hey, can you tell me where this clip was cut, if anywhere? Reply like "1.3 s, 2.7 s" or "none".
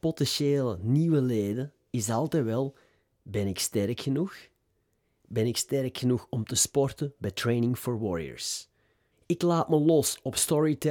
9.1 s

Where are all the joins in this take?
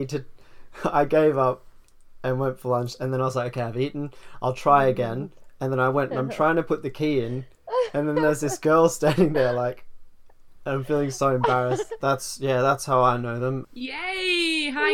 12.0 s, 13.6 s

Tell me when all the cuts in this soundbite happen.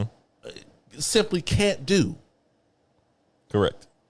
none

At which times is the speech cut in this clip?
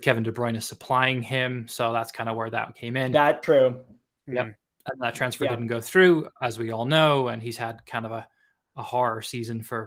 3.4 s

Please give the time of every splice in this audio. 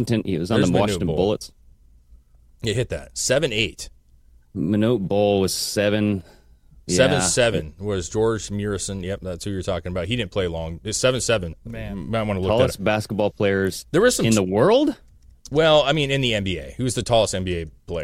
11.5 s

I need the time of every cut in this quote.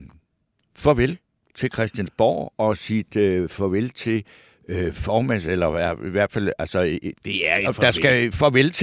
7.2 s

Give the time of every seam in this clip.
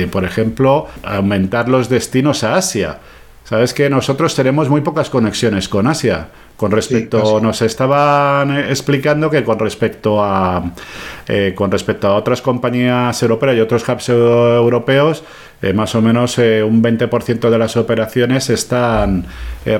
none

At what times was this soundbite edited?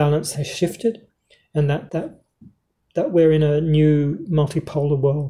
1.9 s

